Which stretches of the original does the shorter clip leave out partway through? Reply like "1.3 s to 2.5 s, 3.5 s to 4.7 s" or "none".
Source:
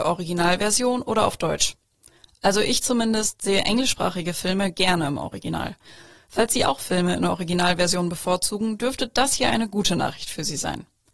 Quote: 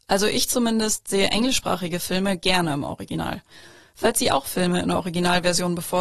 none